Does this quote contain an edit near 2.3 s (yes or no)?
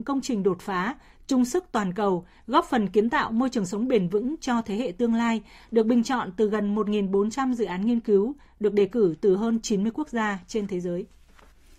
no